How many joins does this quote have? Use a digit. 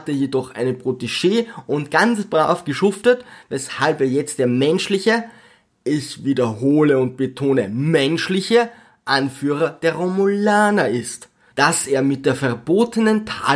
1